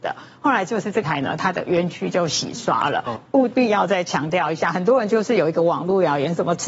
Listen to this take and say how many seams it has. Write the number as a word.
one